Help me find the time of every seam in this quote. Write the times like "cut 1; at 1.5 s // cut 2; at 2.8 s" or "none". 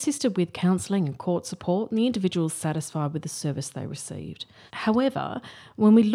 cut 1; at 4.7 s